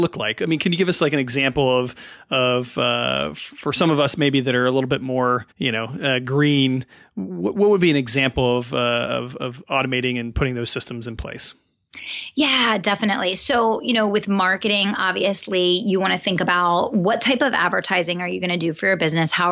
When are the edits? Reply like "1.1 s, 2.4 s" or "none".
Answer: 5.5 s